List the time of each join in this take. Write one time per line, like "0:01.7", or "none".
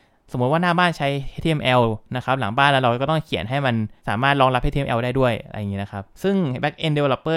0:04.0
0:06.1